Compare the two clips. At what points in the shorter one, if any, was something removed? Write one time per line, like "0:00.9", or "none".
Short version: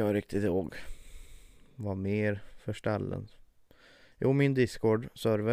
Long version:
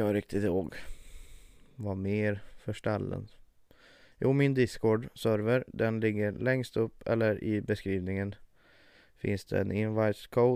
none